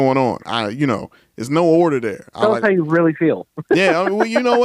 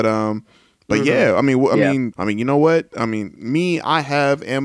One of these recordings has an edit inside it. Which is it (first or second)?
second